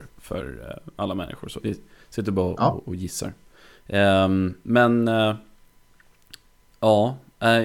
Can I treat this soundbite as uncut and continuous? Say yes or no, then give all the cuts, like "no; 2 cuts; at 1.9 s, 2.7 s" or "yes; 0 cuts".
no; 1 cut; at 1.6 s